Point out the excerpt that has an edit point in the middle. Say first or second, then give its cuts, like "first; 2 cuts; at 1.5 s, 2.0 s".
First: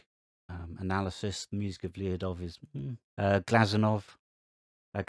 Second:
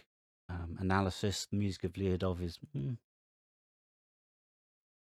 first; 1 cut; at 3.1 s